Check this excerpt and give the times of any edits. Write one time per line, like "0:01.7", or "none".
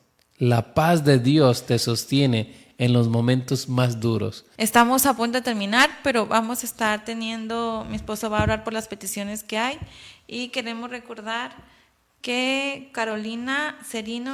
0:04.6